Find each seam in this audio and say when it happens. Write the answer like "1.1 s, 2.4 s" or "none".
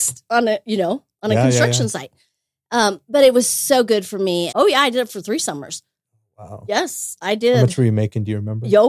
4.5 s, 7.2 s